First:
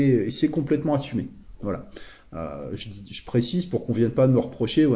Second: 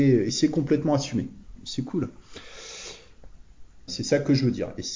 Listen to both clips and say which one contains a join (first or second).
second